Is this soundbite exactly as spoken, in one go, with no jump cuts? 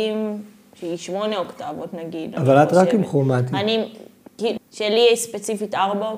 no; 1 cut; at 4.6 s

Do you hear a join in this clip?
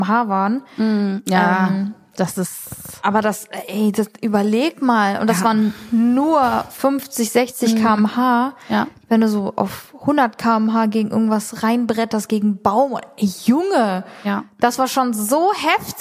no; 0 cuts

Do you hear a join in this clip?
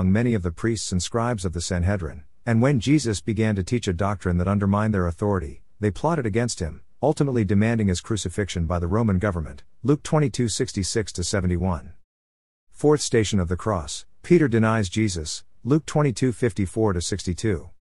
no; 0 cuts

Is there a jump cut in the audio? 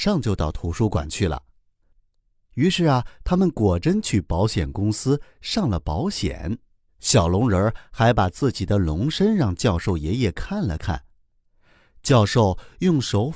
yes; 2 cuts; at 2.4 s, 6.9 s

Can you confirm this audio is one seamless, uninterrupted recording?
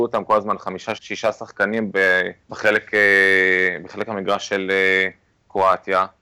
no; 2 cuts; at 1.0 s, 2.4 s

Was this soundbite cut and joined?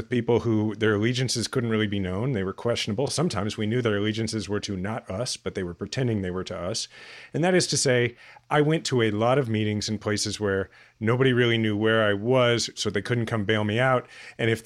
no; 0 cuts

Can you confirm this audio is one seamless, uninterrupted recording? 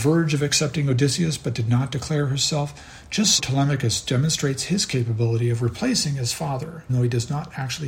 no; 2 cuts; at 3.4 s, 6.9 s

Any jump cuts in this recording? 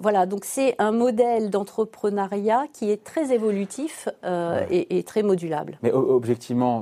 no; 0 cuts

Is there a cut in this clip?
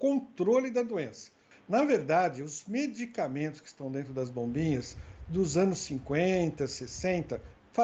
yes; 1 cut; at 1.5 s

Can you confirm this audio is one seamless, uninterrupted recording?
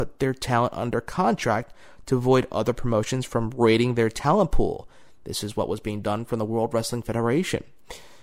yes; 0 cuts

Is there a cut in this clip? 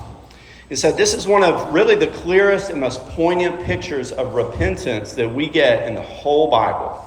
no; 0 cuts

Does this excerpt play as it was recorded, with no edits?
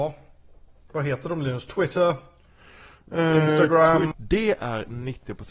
no; 1 cut; at 4.1 s

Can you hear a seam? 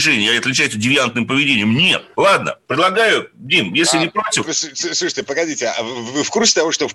yes; 1 cut; at 2.1 s

